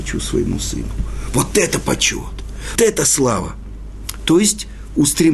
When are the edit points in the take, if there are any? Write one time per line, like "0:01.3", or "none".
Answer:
0:02.8